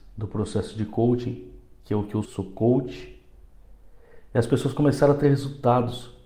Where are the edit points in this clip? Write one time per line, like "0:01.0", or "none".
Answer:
0:02.2